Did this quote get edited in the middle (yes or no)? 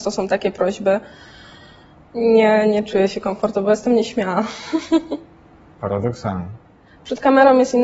no